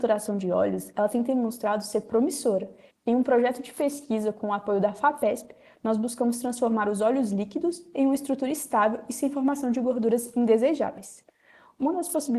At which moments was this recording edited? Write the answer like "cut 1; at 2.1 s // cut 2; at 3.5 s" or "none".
cut 1; at 2.9 s